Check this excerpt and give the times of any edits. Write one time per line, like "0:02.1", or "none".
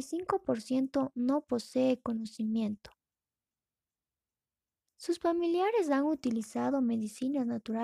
0:04.9